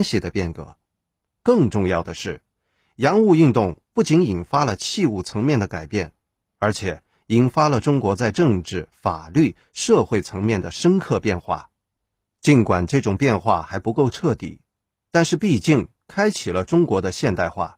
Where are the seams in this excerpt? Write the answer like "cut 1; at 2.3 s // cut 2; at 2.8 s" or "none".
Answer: none